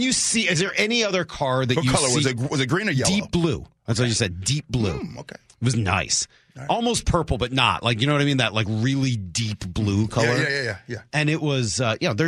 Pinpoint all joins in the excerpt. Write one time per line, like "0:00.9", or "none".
none